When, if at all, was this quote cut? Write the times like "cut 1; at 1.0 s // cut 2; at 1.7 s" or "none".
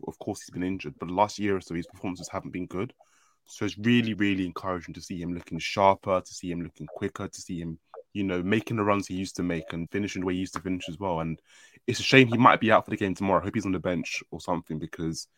cut 1; at 4.1 s // cut 2; at 8.1 s // cut 3; at 9.9 s